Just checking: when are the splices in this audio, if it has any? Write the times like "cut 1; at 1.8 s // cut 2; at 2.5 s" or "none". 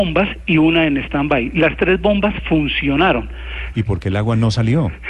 cut 1; at 3.7 s